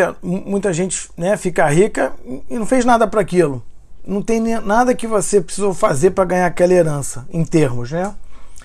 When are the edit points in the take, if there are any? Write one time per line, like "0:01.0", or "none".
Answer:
0:04.0